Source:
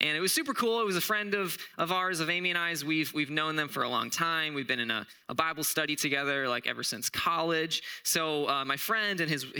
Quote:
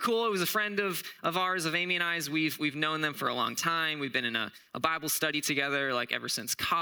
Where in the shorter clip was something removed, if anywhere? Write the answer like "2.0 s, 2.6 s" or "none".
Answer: none